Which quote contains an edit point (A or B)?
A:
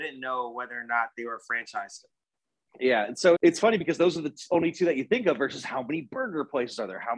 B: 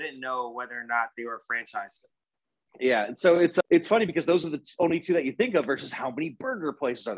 A